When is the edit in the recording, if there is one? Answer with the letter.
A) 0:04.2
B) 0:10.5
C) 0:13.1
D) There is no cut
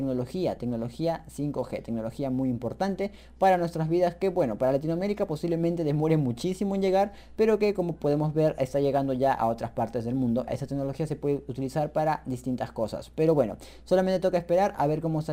B